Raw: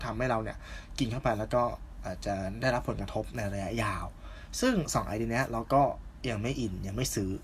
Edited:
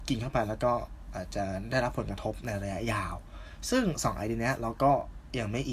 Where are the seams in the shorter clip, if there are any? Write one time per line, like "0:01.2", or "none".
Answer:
none

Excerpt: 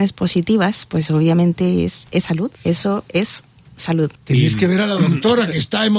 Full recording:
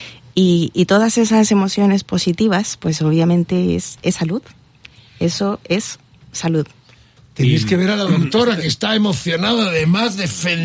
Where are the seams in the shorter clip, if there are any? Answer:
0:02.6
0:04.2

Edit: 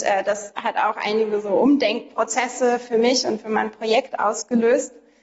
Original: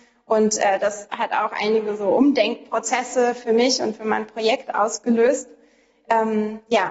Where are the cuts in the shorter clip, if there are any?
none

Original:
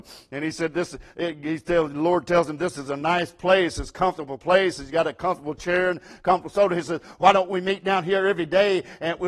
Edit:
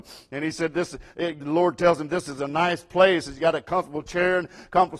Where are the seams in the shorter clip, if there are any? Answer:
0:01.4
0:03.2

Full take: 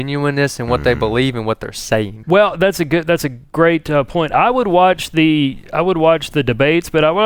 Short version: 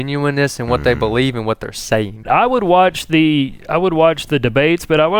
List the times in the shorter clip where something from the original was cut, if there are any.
0:02.2

